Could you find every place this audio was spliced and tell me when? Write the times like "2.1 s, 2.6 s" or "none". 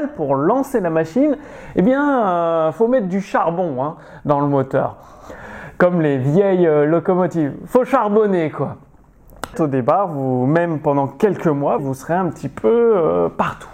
9.5 s, 11.8 s